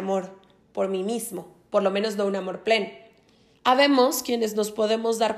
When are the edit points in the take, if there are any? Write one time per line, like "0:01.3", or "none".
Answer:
0:03.5

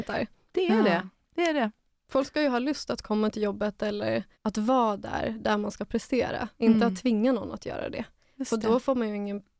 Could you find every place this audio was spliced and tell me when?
0:04.3

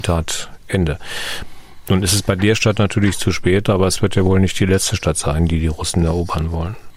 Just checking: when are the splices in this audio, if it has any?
none

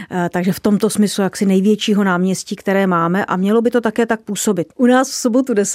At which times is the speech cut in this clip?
0:04.7

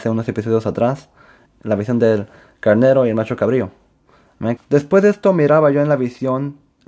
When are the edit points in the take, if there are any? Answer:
0:01.5
0:04.6

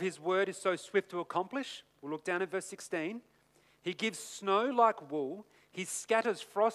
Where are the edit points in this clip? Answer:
none

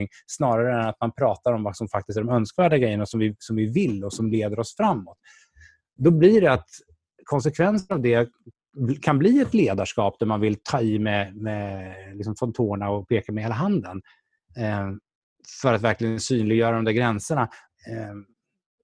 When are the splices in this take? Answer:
0:17.7

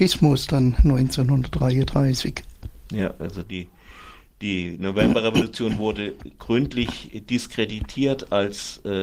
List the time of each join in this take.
none

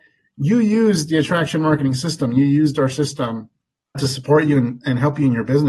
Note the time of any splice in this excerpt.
0:03.9

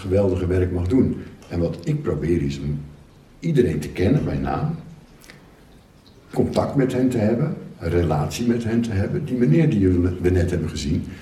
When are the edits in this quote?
none

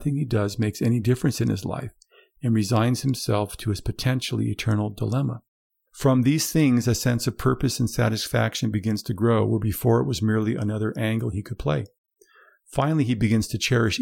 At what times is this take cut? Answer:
0:05.7

